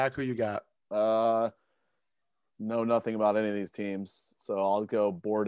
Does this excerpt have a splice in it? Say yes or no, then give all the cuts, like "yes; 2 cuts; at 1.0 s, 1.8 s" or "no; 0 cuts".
no; 0 cuts